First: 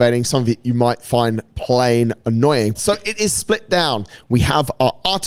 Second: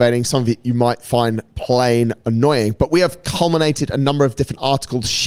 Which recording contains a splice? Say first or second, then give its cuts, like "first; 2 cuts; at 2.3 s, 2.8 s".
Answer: first; 1 cut; at 2.7 s